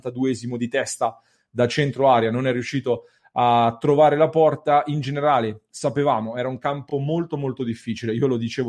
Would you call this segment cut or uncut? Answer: uncut